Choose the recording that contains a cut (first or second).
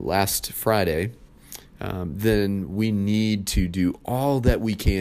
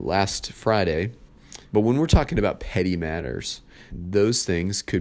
second